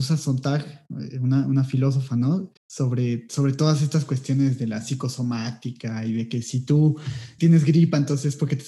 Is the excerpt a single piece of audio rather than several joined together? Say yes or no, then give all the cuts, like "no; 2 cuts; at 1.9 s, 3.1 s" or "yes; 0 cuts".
no; 2 cuts; at 2.6 s, 7.4 s